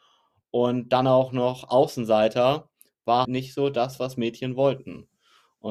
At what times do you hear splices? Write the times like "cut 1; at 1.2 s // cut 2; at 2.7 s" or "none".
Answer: cut 1; at 3.2 s